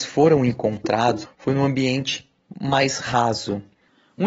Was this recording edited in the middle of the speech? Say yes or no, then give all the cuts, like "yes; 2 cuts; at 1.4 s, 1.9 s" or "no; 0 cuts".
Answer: yes; 1 cut; at 1.2 s